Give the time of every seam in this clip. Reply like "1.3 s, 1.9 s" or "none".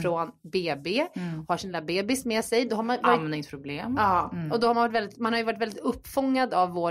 none